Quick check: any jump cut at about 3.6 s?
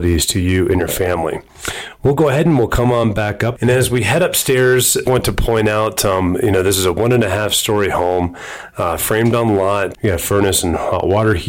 yes; 3 cuts; at 3.6 s, 5.1 s, 9.9 s

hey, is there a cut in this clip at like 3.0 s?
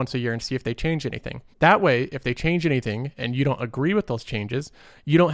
no; 1 cut; at 1.5 s

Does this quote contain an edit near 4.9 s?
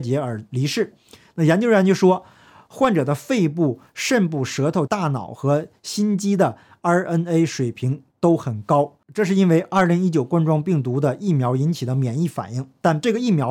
yes; 1 cut; at 4.9 s

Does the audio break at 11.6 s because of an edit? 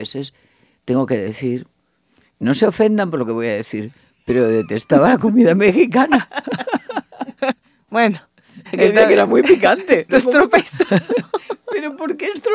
no; 1 cut; at 10.1 s

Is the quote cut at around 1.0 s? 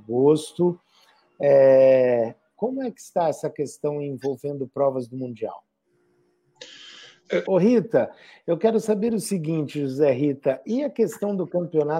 no; 1 cut; at 7.4 s

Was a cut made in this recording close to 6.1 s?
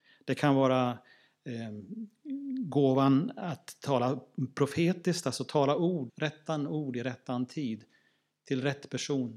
yes; 1 cut; at 6.1 s

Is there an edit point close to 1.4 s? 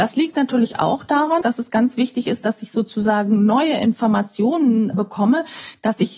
yes; 1 cut; at 1.4 s

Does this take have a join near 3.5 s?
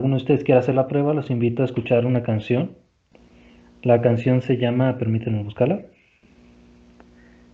no; 0 cuts

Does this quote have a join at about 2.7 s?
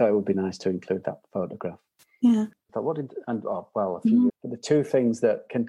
yes; 2 cuts; at 2.7 s, 4.3 s

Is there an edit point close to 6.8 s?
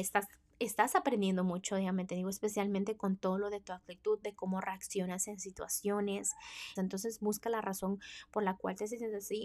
yes; 1 cut; at 6.8 s

